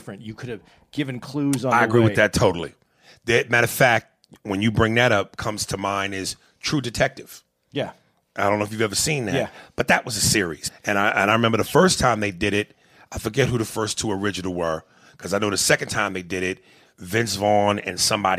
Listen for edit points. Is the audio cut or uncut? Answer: cut